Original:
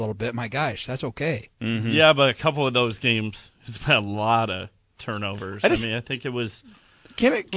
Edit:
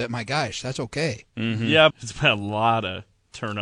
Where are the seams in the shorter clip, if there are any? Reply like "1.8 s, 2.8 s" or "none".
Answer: 1.9 s